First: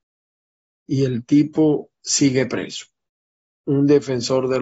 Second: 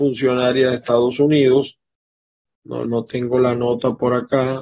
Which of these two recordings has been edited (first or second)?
second